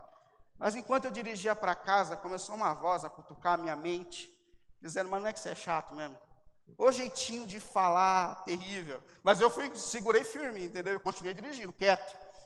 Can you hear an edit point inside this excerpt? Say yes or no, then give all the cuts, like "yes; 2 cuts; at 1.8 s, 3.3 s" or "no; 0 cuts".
no; 0 cuts